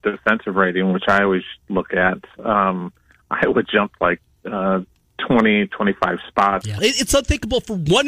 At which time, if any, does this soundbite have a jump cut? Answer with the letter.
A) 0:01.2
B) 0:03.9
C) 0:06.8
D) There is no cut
C